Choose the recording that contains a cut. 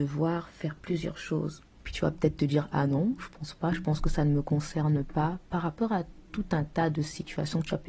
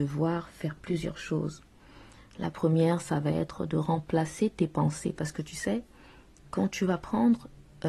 first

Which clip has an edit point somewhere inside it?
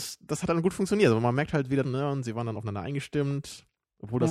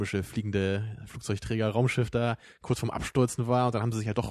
first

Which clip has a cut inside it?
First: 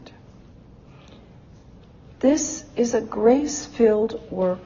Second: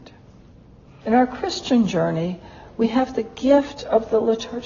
second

